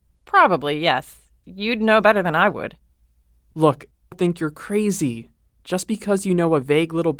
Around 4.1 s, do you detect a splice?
yes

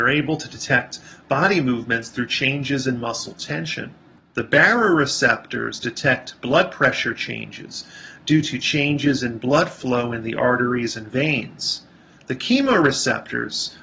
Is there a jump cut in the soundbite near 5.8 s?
no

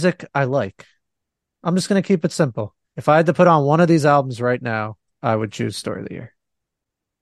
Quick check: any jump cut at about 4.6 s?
no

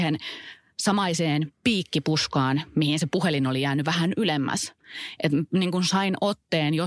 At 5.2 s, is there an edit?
no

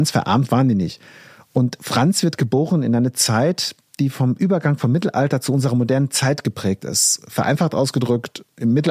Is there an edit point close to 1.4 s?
no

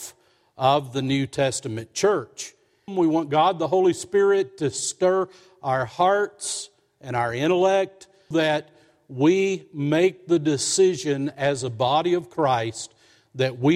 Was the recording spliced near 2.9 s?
yes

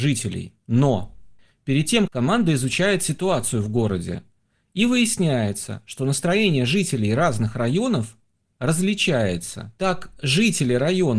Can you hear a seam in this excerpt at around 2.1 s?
yes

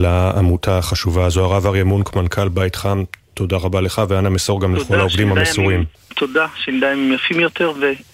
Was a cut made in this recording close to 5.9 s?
yes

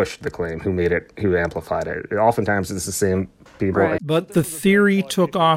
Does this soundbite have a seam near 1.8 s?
no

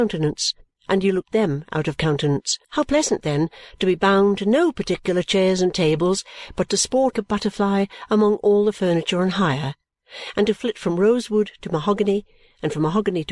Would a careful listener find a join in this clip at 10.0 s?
no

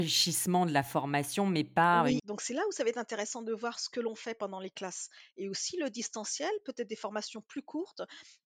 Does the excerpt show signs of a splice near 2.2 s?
yes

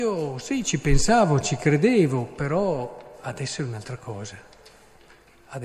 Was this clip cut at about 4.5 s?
no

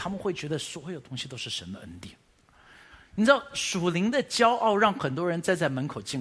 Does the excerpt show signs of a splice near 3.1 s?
no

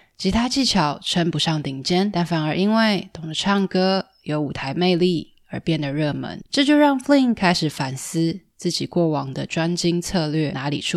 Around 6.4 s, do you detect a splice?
no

